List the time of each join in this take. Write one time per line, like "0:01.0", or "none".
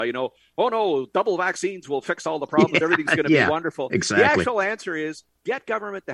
none

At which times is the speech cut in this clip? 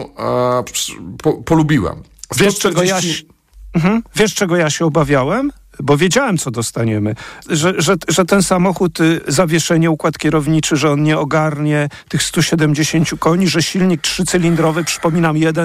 0:07.4

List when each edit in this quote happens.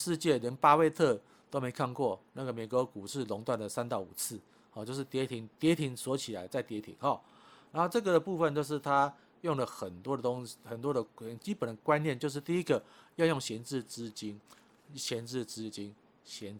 none

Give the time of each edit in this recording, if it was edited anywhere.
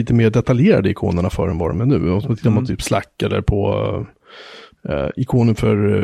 none

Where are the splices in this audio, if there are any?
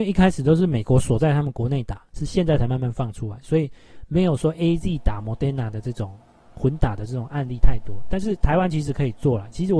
none

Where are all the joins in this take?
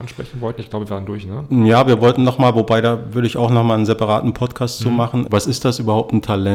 0:05.3

